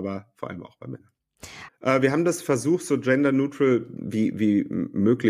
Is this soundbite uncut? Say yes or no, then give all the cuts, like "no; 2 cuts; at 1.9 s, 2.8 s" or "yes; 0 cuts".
no; 1 cut; at 1.7 s